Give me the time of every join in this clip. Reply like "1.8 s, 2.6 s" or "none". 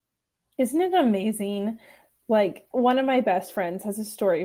2.7 s